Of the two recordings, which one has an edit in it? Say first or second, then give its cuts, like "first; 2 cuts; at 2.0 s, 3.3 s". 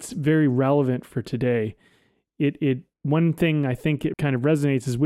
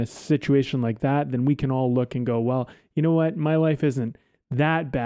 first; 2 cuts; at 2.9 s, 4.1 s